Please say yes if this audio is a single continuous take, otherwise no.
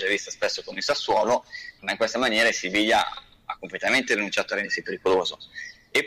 no